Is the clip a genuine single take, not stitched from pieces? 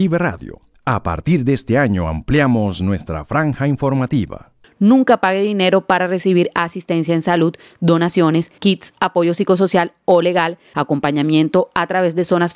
no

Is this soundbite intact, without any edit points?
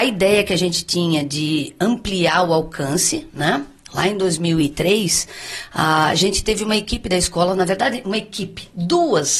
yes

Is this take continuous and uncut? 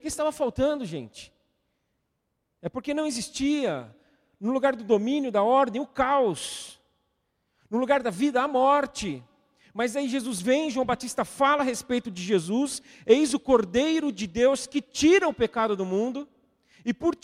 yes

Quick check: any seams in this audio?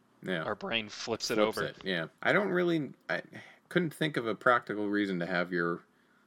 yes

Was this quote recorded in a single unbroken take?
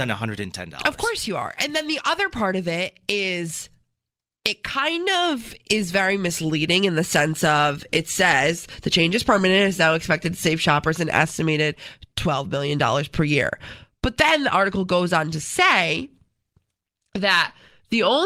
yes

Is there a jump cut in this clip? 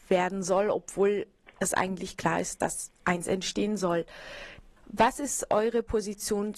yes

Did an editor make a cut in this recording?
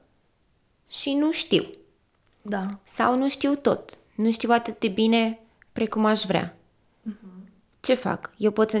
no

